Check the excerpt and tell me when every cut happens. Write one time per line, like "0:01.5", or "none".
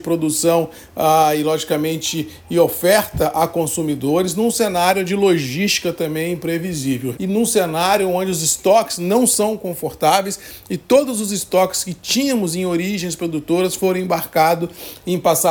0:07.1